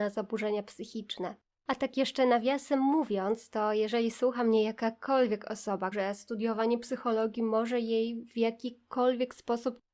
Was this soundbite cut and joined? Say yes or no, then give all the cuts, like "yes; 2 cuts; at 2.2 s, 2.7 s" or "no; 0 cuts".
yes; 1 cut; at 5.9 s